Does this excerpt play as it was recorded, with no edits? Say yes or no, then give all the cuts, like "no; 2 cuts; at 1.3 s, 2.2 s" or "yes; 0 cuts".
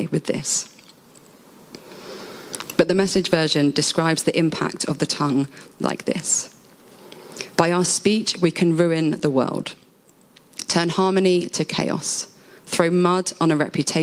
yes; 0 cuts